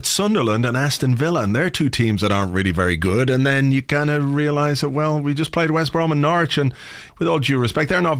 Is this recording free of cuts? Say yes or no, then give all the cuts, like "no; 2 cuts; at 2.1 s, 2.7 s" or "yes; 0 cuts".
no; 1 cut; at 7.1 s